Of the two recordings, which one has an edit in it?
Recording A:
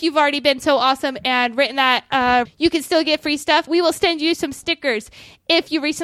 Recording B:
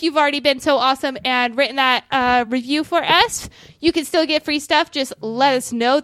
A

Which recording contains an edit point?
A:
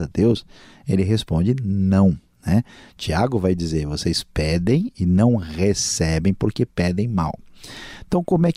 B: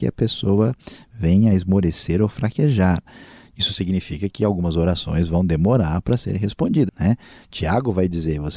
B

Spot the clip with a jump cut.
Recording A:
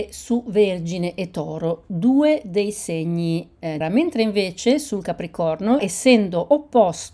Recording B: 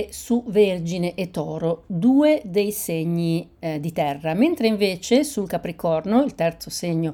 A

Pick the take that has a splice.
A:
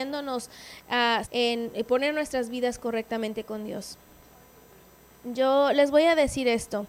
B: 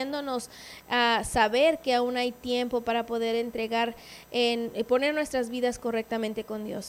A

